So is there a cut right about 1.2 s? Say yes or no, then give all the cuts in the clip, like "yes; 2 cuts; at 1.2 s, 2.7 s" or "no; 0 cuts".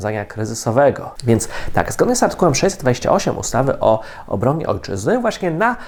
yes; 1 cut; at 1.2 s